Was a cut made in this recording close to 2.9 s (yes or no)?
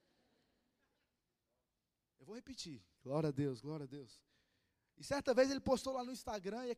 yes